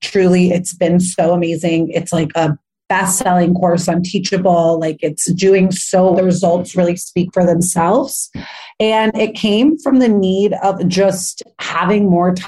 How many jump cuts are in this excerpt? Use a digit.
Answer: 2